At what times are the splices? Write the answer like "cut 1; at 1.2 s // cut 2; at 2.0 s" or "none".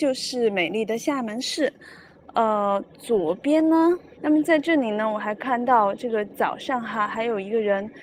cut 1; at 4.2 s